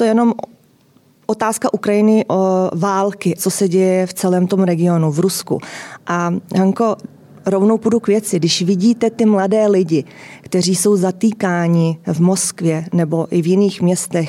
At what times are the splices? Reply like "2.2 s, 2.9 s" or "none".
3.4 s